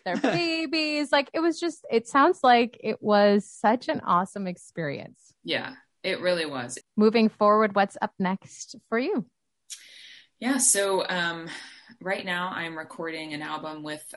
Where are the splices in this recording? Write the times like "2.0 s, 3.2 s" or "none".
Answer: 6.8 s